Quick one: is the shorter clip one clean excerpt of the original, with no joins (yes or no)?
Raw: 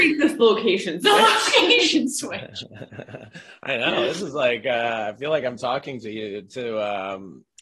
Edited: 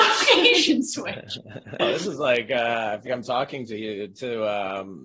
no